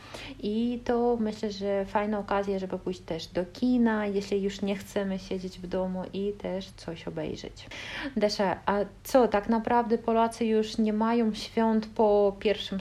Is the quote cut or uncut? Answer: cut